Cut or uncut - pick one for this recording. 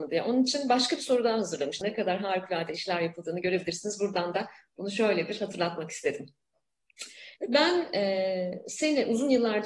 cut